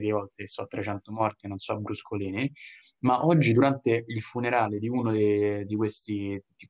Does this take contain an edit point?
no; 0 cuts

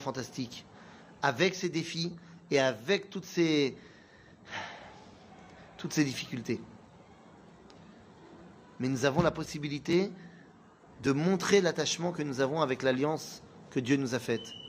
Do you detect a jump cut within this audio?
no; 0 cuts

